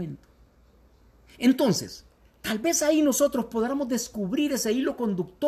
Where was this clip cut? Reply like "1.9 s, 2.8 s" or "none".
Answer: none